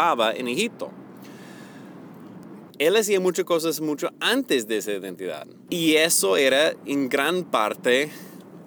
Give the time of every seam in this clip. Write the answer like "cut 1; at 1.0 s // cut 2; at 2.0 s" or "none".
cut 1; at 2.7 s // cut 2; at 5.7 s